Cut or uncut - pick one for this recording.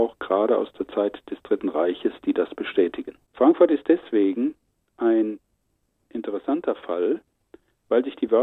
cut